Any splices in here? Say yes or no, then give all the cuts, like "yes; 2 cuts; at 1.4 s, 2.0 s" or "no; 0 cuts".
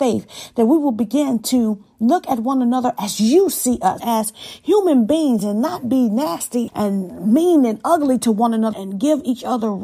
yes; 3 cuts; at 4.0 s, 6.7 s, 8.7 s